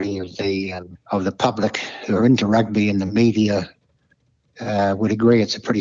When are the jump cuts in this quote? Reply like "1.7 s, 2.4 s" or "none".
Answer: none